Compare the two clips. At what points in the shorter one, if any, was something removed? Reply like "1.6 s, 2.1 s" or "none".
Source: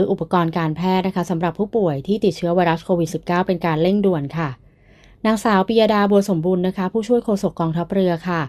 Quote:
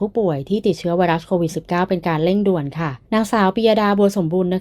3.0 s